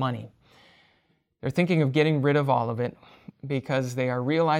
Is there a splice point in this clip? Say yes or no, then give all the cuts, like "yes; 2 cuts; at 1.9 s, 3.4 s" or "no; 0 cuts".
yes; 1 cut; at 3.3 s